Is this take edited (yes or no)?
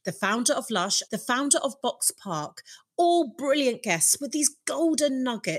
yes